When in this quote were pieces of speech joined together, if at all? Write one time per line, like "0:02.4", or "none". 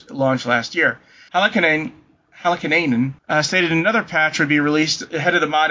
0:01.3
0:03.2